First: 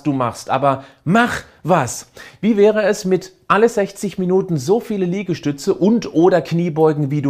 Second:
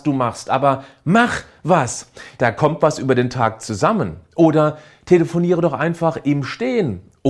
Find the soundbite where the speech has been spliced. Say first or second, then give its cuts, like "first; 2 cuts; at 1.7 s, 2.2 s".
second; 1 cut; at 2.4 s